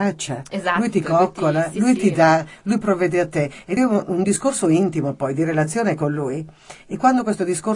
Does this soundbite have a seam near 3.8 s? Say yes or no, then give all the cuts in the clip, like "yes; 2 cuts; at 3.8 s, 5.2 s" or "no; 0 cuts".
no; 0 cuts